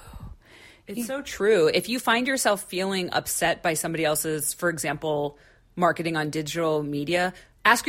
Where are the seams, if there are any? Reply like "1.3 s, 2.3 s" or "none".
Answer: none

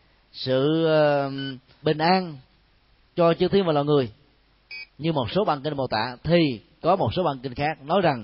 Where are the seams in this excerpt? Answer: 1.8 s, 4.9 s

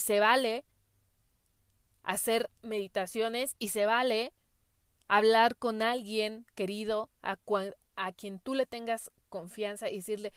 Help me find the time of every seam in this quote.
none

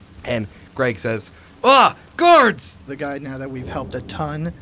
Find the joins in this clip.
2.9 s

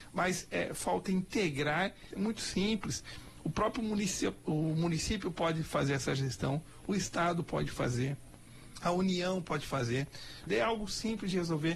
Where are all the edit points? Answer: 2.1 s, 10.5 s

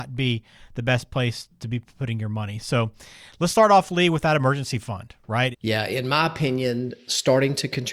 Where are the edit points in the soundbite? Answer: 5.5 s

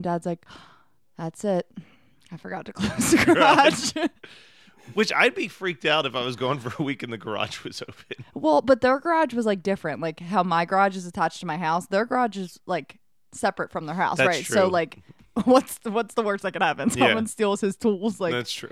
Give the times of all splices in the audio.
none

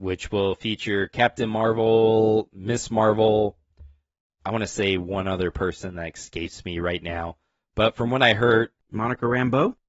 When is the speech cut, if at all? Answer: none

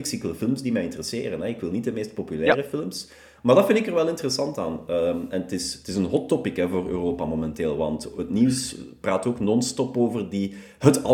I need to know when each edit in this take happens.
none

